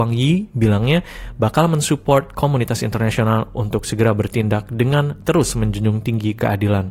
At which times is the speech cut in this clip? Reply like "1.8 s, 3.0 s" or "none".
none